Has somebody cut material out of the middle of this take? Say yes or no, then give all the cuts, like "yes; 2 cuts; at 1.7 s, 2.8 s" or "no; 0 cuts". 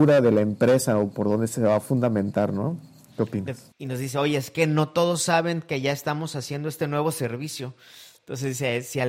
yes; 1 cut; at 3.7 s